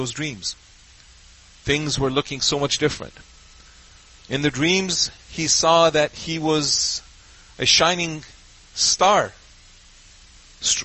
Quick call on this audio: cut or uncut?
uncut